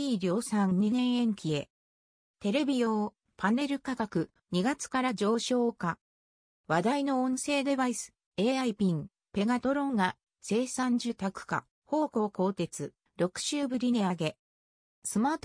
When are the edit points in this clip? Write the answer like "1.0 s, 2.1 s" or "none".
11.7 s